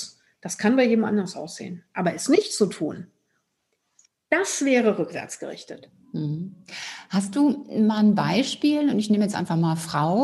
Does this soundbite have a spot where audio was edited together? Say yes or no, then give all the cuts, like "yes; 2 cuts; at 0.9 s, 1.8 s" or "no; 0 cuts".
no; 0 cuts